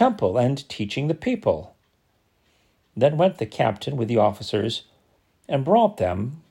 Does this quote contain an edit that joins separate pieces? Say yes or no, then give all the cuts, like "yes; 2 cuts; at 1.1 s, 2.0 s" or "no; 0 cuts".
no; 0 cuts